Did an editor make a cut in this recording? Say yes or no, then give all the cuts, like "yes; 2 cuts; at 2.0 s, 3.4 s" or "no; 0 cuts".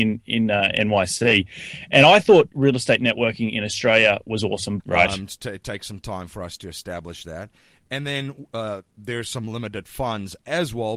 yes; 1 cut; at 4.8 s